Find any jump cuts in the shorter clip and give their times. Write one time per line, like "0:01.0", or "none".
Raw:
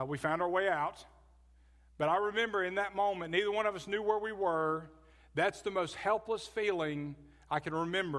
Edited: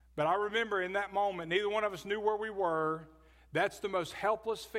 none